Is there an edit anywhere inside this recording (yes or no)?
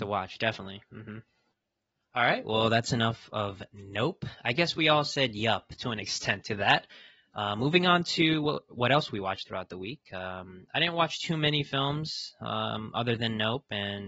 no